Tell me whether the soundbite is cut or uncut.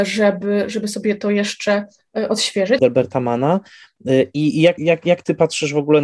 cut